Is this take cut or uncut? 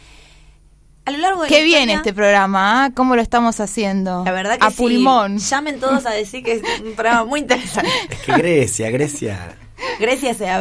uncut